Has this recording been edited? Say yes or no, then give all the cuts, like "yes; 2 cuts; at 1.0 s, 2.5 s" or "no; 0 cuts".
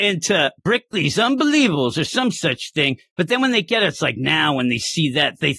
no; 0 cuts